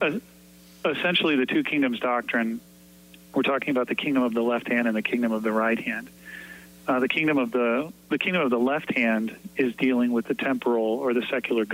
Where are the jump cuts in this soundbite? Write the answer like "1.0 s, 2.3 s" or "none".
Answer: none